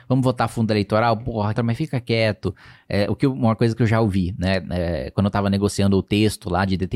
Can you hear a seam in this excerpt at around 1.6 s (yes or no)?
yes